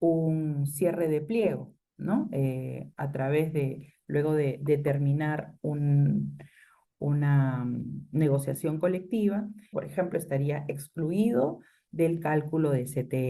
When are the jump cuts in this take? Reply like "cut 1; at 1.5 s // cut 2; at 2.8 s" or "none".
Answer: cut 1; at 9.7 s